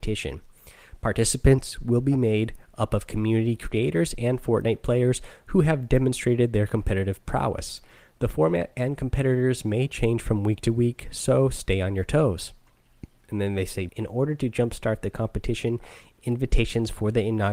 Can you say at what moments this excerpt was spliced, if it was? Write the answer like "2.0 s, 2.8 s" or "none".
13.9 s